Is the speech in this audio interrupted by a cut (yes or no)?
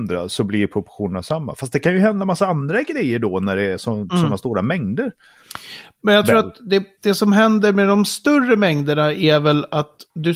no